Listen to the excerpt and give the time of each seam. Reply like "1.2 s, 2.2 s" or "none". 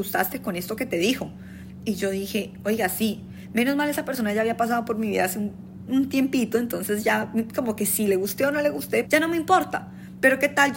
5.9 s, 9.0 s